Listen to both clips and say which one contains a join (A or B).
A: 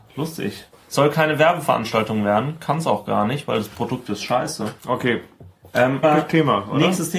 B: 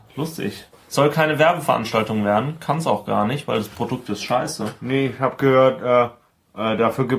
A